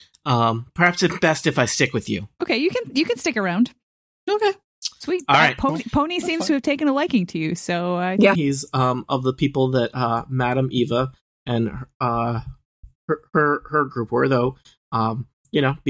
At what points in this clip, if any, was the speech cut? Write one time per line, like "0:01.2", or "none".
0:08.4
0:13.0